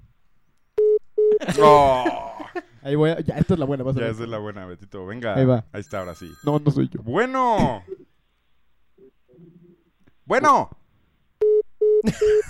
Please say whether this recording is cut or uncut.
cut